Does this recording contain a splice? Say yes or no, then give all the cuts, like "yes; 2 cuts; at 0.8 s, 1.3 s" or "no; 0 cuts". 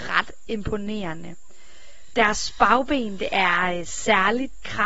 no; 0 cuts